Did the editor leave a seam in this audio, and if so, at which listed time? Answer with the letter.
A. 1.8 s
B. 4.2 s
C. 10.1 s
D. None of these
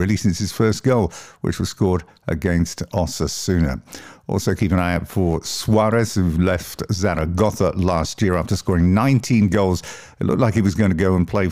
D